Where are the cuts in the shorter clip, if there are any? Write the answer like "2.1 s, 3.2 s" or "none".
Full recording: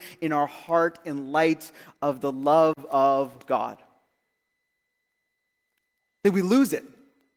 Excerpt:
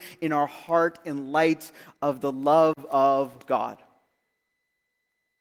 none